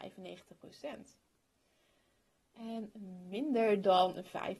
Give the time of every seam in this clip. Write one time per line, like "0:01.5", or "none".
none